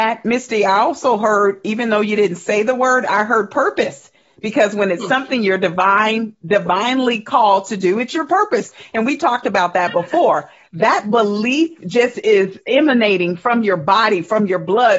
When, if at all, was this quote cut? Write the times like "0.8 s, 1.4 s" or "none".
none